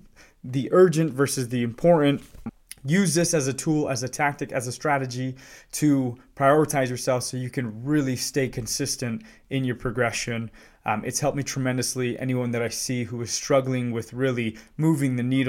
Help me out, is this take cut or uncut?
uncut